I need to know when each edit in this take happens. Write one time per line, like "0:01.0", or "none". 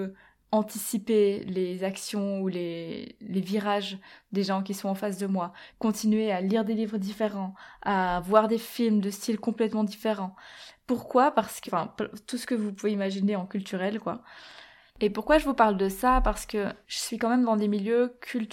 0:05.7
0:11.7
0:16.8